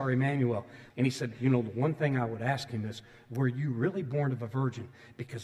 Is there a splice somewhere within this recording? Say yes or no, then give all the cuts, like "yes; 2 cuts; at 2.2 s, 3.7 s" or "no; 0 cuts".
yes; 1 cut; at 0.9 s